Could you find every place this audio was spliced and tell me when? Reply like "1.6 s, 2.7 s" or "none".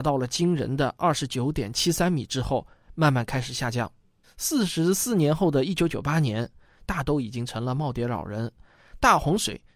4.2 s, 6.9 s